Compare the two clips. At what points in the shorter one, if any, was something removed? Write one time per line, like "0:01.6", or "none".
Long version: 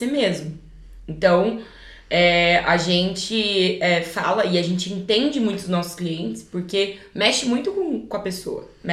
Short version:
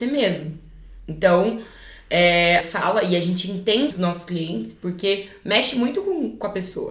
0:02.6
0:03.9

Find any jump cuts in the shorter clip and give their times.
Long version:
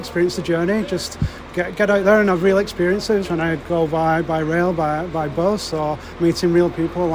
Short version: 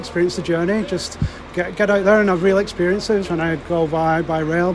none

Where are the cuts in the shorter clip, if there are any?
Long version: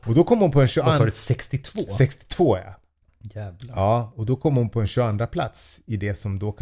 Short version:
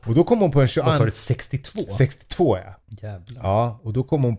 0:02.8

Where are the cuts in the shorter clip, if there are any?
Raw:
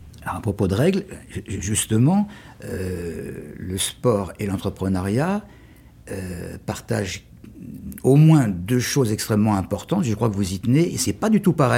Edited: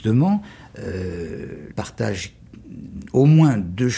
0:01.7

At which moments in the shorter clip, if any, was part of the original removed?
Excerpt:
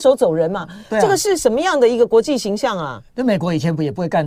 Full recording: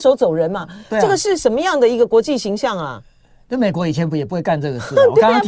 0:03.1

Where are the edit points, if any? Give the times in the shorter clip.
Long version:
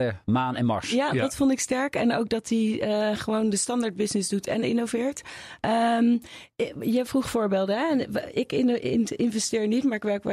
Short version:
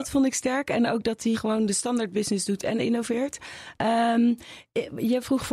0:01.3

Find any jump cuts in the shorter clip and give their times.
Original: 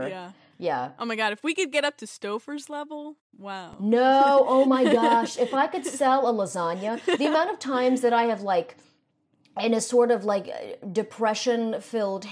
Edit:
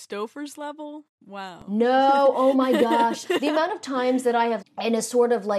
0:03.2
0:04.6

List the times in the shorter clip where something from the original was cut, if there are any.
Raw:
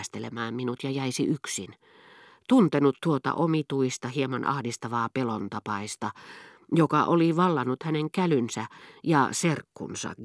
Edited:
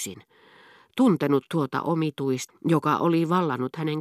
0:02.5

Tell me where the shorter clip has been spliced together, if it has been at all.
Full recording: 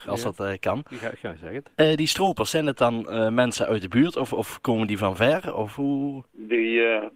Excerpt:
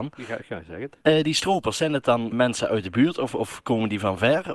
0:02.3

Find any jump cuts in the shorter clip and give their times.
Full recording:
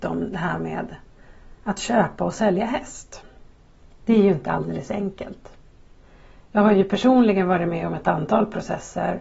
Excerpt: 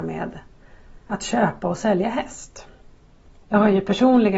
0:03.4

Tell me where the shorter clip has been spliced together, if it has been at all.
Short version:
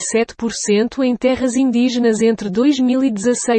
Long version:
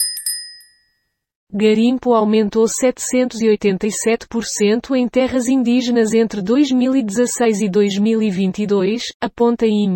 none

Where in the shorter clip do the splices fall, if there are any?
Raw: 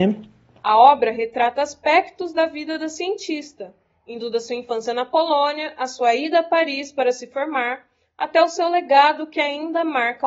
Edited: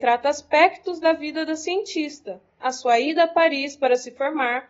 0:02.6

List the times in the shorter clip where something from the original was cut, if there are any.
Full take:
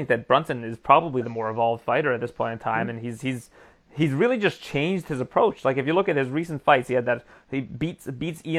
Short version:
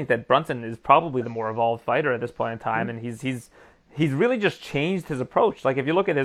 none

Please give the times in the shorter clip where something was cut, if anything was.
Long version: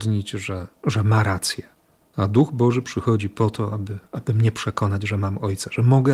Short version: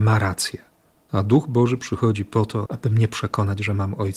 0:02.7

